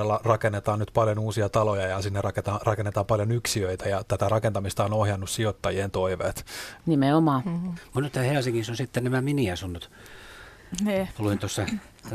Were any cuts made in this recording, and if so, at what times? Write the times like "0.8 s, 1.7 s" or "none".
6.8 s